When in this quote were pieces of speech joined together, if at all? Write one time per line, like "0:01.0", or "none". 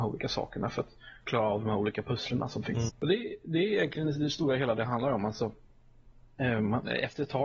0:02.9

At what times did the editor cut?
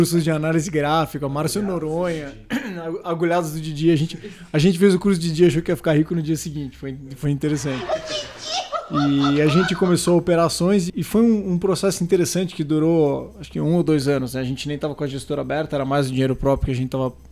0:10.9

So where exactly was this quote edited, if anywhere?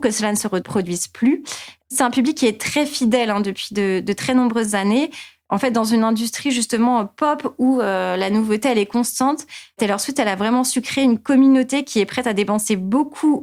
0:01.8

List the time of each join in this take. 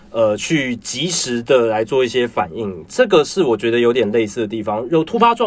none

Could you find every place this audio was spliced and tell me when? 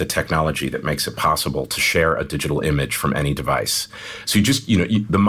none

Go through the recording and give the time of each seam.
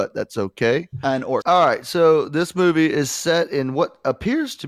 0:01.4

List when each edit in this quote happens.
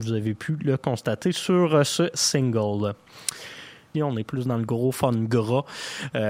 0:03.9

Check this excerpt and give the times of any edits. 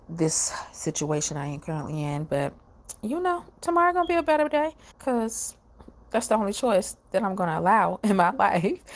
0:03.5
0:04.9

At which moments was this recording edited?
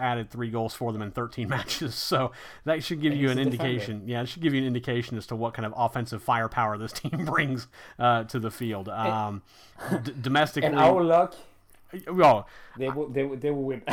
none

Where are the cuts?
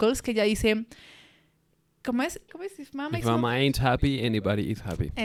0:02.5

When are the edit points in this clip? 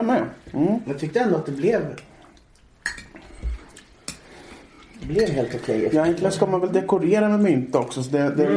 none

